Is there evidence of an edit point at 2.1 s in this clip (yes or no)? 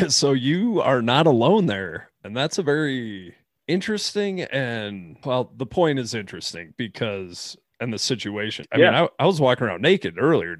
no